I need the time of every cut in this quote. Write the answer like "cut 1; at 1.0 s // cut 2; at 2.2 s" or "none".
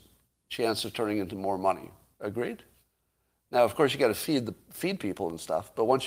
none